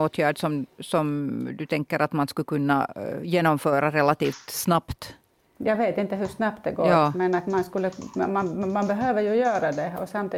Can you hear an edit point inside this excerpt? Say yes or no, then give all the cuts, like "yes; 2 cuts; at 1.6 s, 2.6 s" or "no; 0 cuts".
no; 0 cuts